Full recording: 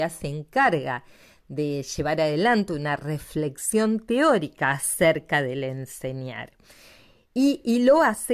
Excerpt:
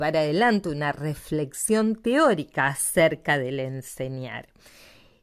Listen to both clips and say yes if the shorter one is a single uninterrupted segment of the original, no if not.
yes